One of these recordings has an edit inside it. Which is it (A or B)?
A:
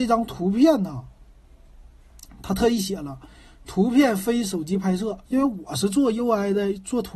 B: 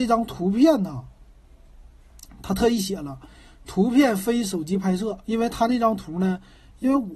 A